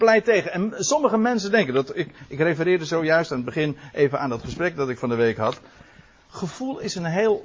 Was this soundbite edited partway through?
no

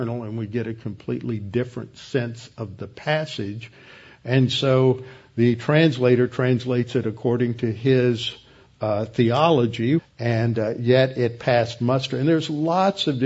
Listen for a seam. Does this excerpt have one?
yes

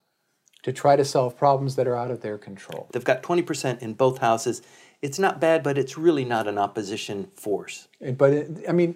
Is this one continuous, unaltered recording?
no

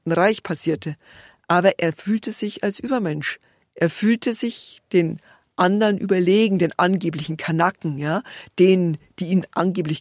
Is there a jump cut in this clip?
no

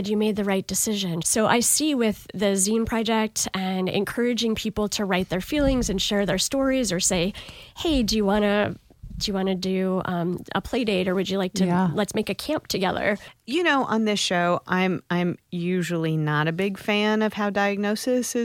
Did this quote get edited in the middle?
yes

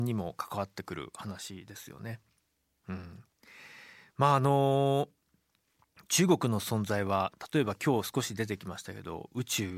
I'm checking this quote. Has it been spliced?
no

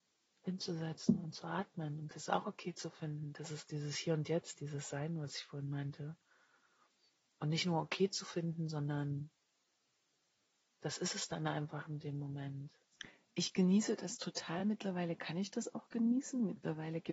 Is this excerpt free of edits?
yes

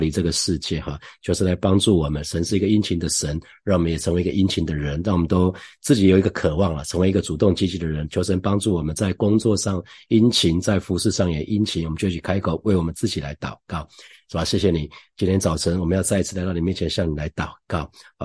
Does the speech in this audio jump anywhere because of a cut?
no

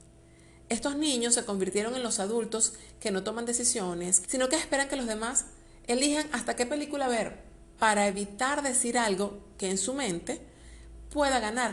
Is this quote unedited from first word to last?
no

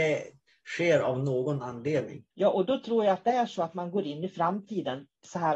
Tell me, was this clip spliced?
yes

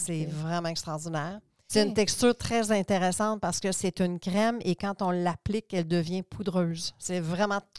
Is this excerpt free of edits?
no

